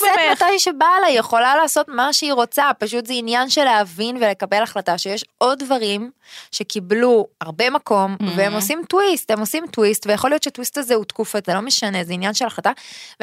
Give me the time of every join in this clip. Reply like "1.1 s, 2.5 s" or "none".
7.3 s, 11.4 s